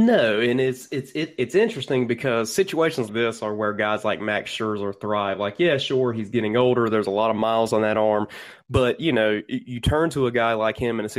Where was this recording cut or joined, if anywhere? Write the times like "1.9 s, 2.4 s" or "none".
3.1 s